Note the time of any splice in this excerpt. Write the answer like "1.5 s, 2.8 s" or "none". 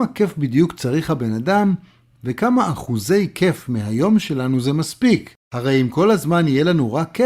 none